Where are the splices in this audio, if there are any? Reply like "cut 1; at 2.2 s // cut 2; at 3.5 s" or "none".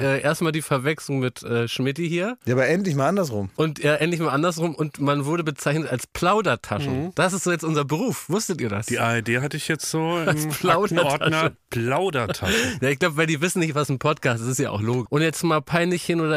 cut 1; at 15.1 s